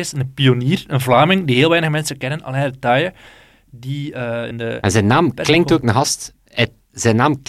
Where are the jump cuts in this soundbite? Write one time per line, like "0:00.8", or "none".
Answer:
0:04.5
0:05.8